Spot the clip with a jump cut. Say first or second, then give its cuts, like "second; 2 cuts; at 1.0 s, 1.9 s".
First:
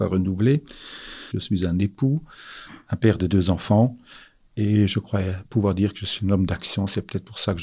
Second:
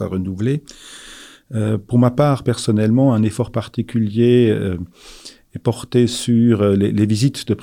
first; 1 cut; at 1.3 s